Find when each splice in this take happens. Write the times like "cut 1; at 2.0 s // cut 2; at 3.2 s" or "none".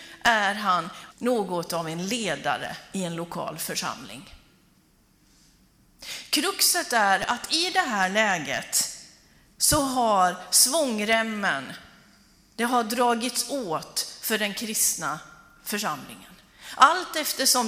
cut 1; at 1.1 s